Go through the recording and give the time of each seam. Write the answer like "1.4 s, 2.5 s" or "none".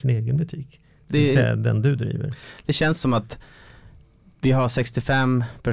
none

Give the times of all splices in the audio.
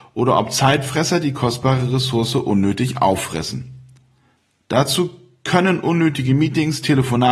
none

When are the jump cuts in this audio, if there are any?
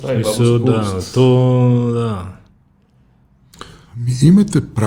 3.8 s

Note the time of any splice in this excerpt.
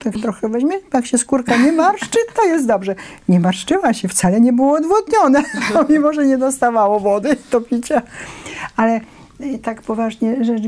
none

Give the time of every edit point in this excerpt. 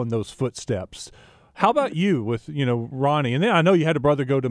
none

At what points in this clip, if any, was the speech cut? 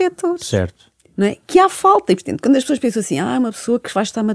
none

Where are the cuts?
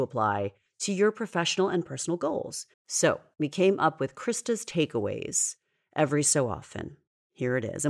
2.7 s

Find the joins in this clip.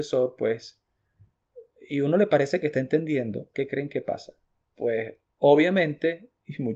3.5 s

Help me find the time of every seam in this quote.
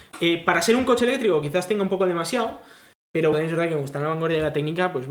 3.3 s

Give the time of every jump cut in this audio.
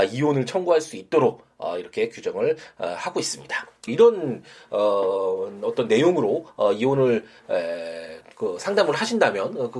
3.9 s

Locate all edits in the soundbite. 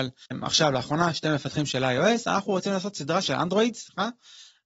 3.2 s

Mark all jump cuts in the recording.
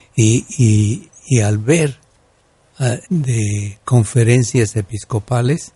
3.0 s

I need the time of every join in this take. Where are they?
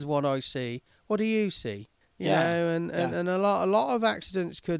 none

